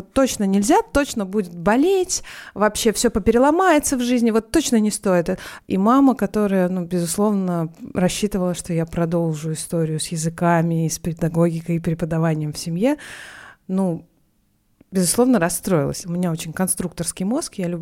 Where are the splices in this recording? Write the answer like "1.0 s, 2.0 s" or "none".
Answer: 5.6 s, 16.0 s